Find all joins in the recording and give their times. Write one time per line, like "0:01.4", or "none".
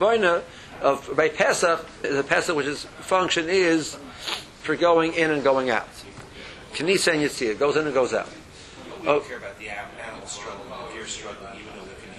0:02.0